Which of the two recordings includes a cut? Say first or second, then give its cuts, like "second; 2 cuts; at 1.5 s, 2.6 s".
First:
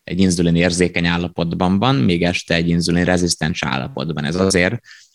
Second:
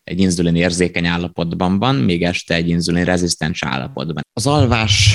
second; 1 cut; at 4.2 s